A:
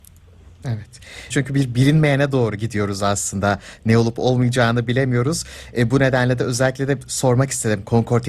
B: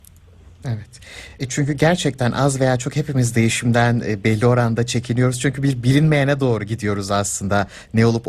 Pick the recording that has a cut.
A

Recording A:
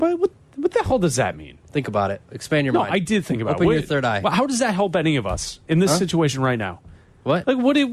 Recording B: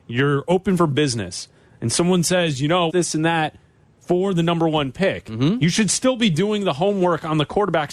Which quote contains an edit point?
B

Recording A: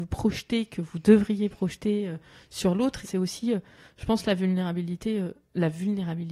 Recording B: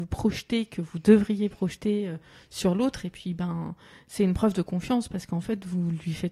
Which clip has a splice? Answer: A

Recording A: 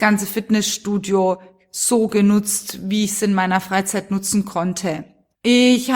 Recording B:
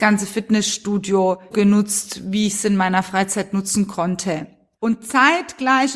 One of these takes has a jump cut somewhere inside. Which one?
B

